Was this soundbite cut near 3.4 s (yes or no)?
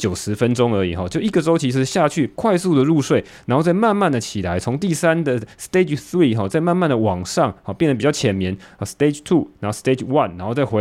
yes